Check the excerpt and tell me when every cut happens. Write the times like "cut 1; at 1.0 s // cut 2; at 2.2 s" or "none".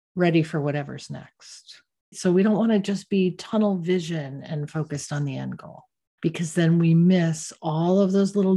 cut 1; at 2.1 s